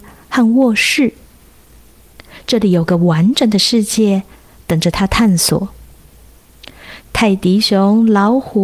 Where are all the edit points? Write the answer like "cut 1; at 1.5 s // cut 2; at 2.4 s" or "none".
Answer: cut 1; at 7.0 s